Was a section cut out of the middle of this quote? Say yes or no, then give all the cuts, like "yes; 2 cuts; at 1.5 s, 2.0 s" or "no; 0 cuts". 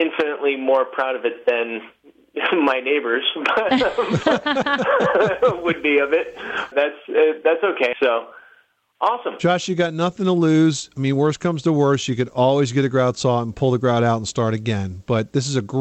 yes; 2 cuts; at 6.7 s, 7.9 s